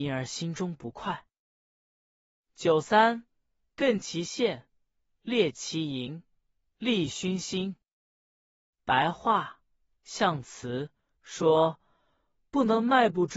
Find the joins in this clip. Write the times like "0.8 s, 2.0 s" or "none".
8.1 s